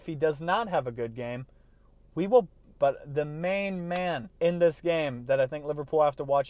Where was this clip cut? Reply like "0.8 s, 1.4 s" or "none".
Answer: 2.8 s, 4.3 s

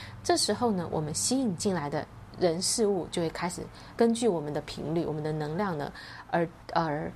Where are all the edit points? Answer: none

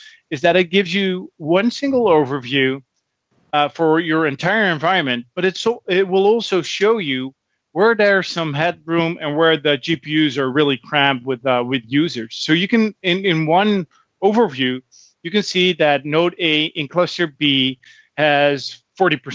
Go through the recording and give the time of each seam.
none

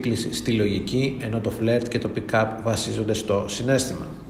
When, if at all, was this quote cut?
none

